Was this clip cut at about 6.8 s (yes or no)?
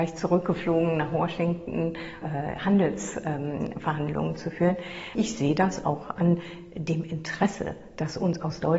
no